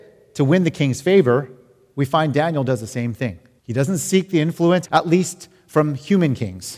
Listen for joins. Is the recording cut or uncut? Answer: cut